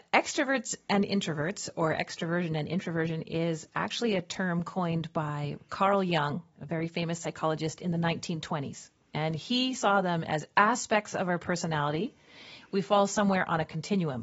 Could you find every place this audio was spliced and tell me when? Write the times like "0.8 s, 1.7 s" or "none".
12.6 s